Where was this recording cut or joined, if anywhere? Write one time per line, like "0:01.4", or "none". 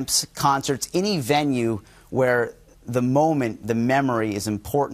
none